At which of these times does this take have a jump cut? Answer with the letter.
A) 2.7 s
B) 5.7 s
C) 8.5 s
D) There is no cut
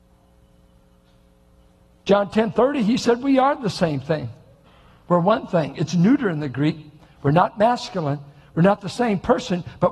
D